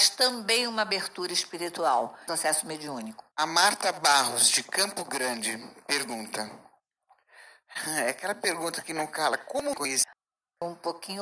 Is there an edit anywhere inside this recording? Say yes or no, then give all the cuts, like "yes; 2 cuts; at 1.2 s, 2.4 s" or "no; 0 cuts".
yes; 1 cut; at 3.3 s